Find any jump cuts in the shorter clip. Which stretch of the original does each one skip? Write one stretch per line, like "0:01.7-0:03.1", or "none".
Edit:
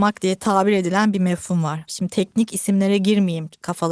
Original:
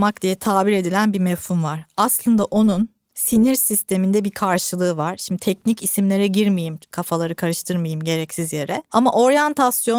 0:01.9-0:05.2